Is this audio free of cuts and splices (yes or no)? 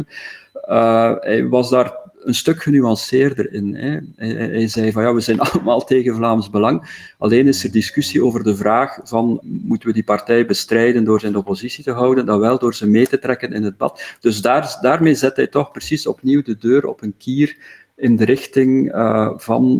no